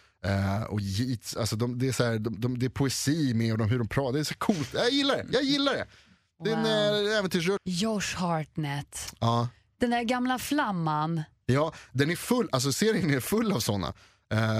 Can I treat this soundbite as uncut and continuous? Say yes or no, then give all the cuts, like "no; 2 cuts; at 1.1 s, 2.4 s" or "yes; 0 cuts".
no; 1 cut; at 7.6 s